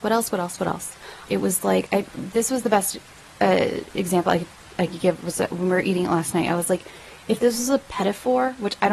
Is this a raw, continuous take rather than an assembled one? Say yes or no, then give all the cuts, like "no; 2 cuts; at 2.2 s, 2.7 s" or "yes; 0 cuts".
no; 1 cut; at 1.3 s